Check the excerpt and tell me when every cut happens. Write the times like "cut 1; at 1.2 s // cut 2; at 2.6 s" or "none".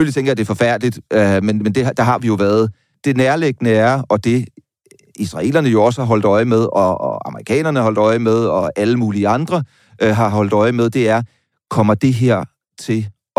none